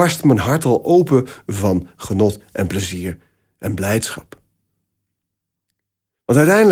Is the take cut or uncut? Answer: uncut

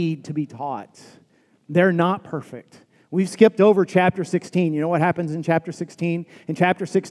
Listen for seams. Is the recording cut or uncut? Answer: uncut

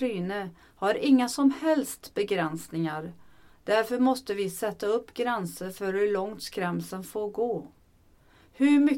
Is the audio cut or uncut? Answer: uncut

